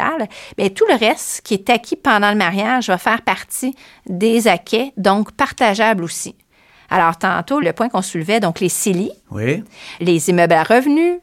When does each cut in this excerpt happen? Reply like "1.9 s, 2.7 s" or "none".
7.6 s, 10.0 s